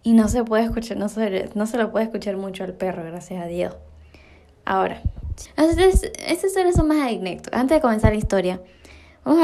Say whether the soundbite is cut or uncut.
cut